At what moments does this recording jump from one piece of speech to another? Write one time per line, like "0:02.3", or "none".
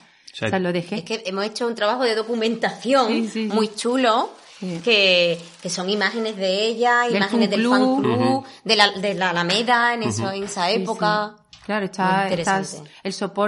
none